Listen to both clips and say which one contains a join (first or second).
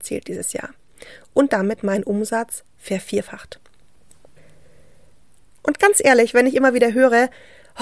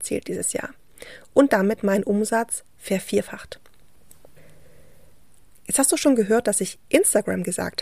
first